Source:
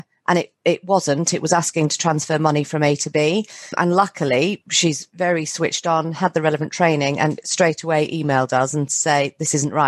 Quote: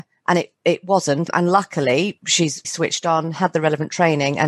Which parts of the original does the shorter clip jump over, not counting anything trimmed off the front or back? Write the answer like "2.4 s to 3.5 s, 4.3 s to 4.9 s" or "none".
1.3 s to 3.7 s, 5.1 s to 5.5 s

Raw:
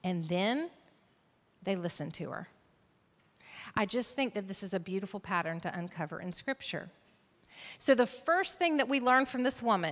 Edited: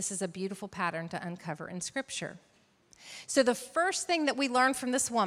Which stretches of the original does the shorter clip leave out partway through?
none

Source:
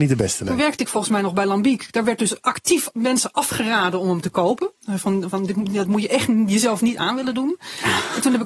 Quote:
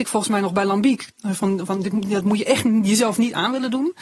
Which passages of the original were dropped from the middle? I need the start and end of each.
1.9 s to 4.7 s

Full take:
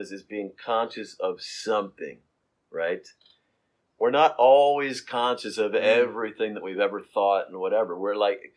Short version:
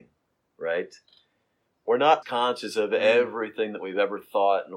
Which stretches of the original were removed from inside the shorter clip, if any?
4.3 s to 5.0 s

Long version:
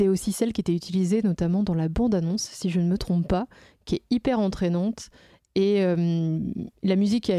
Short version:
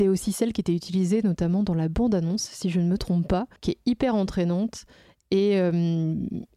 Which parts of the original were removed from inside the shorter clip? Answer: 3.6 s to 3.8 s

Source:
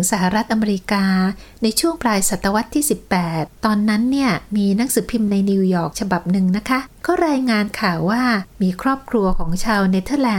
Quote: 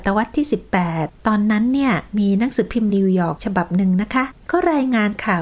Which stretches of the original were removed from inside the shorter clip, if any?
5.3 s to 5.5 s

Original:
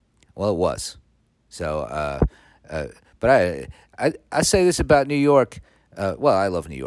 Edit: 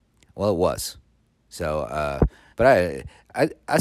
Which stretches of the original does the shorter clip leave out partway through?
2.5 s to 3.1 s

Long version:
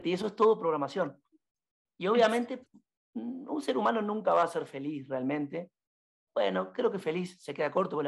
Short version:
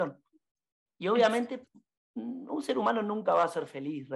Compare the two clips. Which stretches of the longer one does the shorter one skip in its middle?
none

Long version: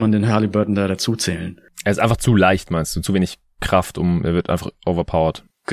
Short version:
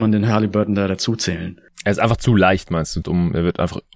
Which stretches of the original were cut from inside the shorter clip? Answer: 3.0 s to 3.9 s

